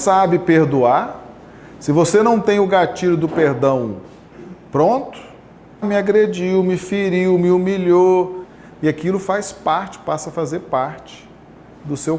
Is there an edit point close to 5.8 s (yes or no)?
yes